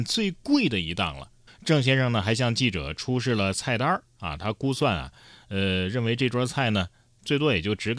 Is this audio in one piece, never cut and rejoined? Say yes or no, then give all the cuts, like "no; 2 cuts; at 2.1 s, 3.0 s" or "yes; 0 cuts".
no; 1 cut; at 1.5 s